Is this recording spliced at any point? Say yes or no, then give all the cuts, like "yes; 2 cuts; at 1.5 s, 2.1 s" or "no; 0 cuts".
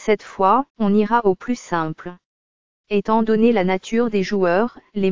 yes; 1 cut; at 2.7 s